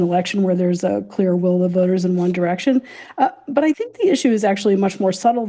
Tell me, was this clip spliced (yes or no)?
no